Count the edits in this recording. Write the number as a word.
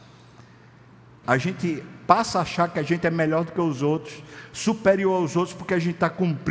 one